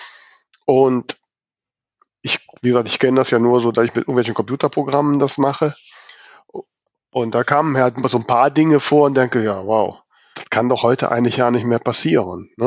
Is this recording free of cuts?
no; 1 cut; at 10.3 s

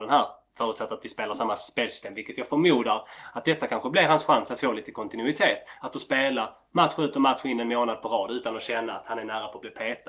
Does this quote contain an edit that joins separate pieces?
no; 0 cuts

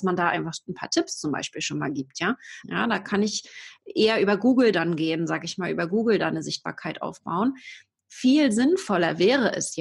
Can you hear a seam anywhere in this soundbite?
yes; 1 cut; at 2.6 s

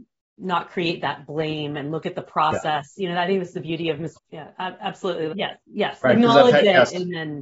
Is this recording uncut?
no; 2 cuts; at 4.1 s, 5.3 s

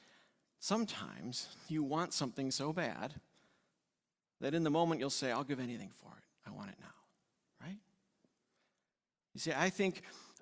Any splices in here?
no; 0 cuts

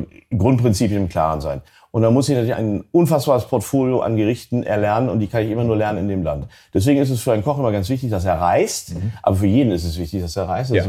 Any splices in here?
yes; 1 cut; at 2.5 s

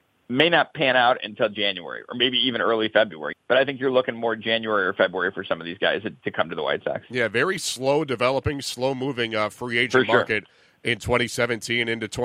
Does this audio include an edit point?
yes; 1 cut; at 3.3 s

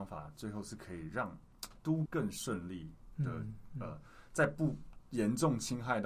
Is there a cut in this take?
yes; 1 cut; at 2.1 s

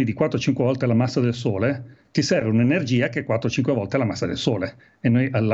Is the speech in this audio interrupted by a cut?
no; 0 cuts

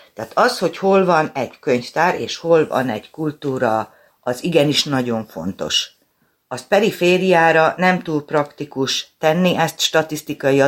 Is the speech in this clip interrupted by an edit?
yes; 1 cut; at 4.1 s

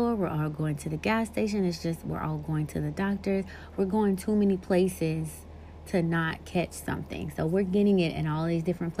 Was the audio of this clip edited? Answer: no; 0 cuts

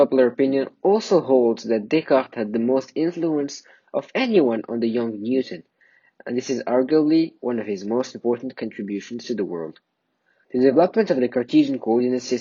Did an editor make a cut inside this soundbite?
yes; 1 cut; at 10.4 s

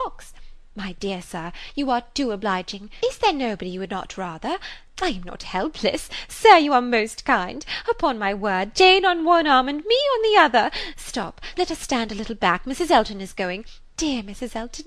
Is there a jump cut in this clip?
yes; 1 cut; at 11.5 s

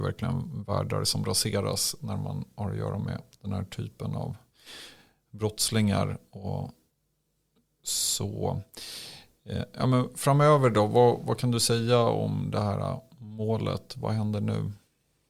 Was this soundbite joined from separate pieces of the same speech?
no; 0 cuts

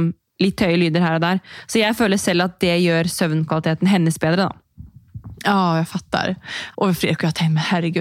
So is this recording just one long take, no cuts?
no; 1 cut; at 6.7 s

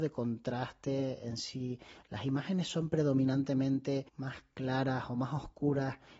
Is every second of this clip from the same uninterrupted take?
no; 1 cut; at 4.1 s

